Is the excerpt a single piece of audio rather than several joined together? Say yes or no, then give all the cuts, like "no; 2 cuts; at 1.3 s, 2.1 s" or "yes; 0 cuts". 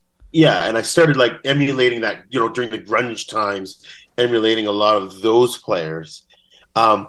yes; 0 cuts